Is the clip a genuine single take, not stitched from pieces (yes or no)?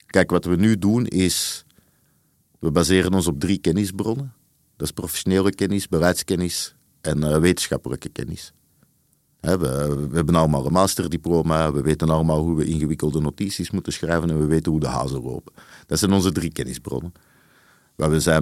yes